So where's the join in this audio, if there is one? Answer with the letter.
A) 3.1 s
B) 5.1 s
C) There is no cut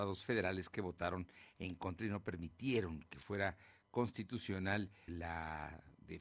B